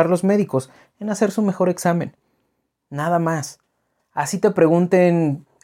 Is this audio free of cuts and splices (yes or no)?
yes